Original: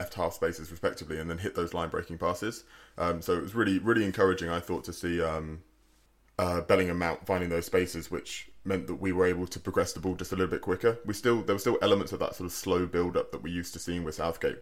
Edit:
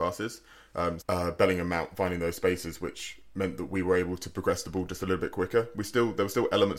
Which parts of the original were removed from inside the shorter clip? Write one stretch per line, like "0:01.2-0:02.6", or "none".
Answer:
0:03.2-0:06.3